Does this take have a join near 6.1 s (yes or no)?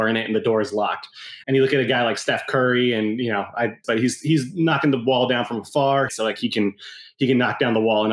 yes